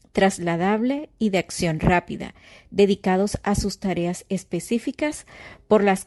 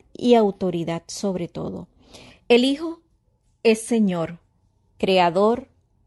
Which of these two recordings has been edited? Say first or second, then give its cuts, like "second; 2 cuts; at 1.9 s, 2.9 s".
second; 1 cut; at 2.3 s